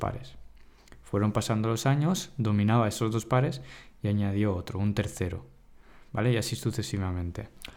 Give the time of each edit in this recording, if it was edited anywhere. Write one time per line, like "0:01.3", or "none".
0:06.1